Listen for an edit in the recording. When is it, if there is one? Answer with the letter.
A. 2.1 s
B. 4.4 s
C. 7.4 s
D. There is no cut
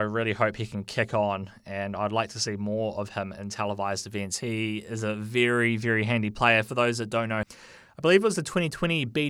C